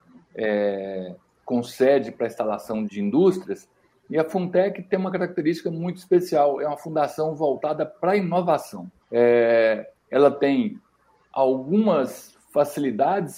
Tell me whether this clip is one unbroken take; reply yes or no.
no